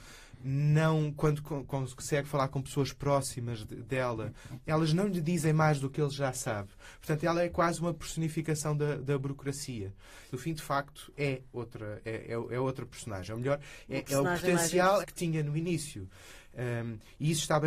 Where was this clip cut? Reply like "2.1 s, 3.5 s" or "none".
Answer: 10.3 s, 15.0 s